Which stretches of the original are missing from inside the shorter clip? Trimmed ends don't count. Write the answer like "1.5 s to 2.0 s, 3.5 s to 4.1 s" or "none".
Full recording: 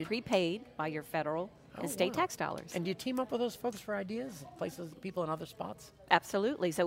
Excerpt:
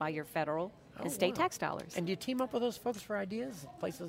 none